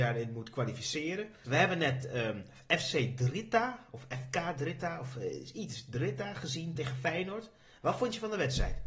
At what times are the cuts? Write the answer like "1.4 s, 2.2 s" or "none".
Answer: 1.4 s, 6.8 s